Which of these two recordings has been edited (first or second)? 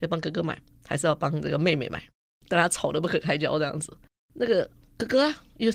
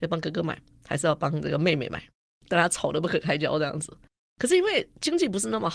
second